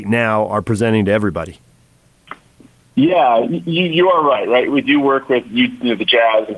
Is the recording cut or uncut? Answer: uncut